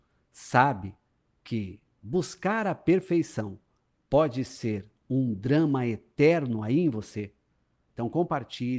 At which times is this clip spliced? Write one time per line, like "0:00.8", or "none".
0:07.8